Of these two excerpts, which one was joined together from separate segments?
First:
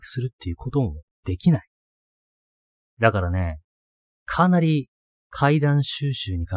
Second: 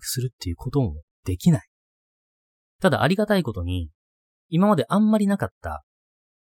second; 1 cut; at 2.7 s

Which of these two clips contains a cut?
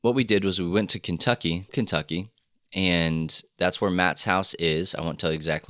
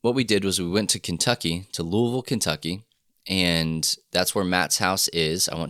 first; 1 cut; at 1.7 s

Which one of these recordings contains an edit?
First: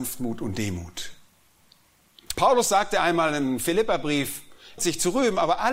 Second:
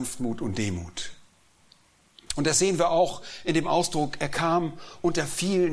first; 2 cuts; at 2.3 s, 4.8 s

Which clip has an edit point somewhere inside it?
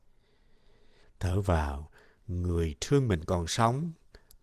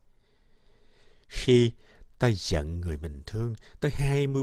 first; 1 cut; at 1.0 s

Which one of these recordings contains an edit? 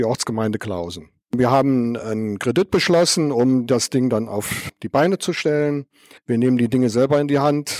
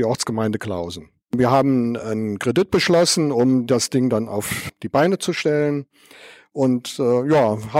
first; 1 cut; at 6.2 s

